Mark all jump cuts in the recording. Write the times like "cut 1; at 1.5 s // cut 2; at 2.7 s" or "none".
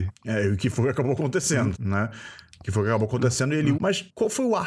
cut 1; at 1.8 s // cut 2; at 3.8 s